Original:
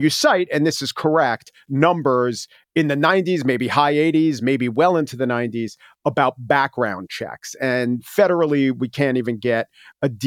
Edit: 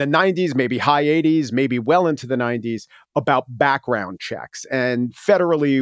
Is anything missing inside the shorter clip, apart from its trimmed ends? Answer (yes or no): no